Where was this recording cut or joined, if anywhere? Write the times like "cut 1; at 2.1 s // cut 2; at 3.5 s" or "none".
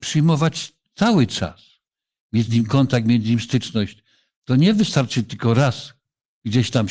none